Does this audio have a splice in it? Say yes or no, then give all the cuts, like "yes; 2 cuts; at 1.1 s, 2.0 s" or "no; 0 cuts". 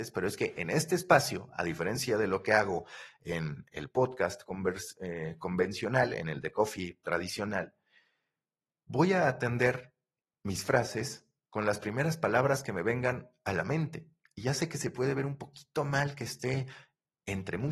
no; 0 cuts